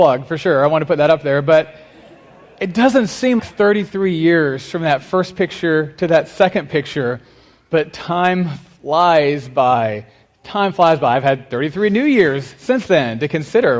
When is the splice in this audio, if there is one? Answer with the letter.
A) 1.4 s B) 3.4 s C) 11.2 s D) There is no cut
B